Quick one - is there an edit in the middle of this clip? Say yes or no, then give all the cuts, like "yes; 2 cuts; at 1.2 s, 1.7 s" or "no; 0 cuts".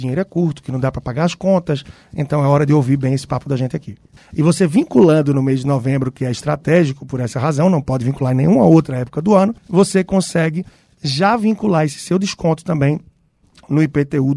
yes; 2 cuts; at 4.2 s, 9.6 s